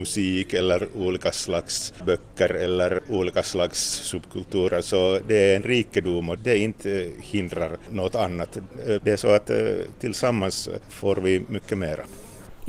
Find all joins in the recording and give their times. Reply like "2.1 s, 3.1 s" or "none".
6.4 s, 9.0 s